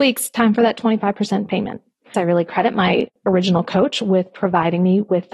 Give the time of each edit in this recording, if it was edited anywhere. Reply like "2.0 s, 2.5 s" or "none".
2.1 s